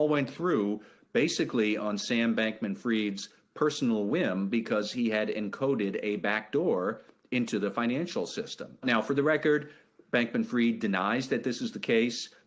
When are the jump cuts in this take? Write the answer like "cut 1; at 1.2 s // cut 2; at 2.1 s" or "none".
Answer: none